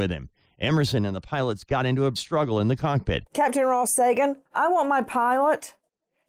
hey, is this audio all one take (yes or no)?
no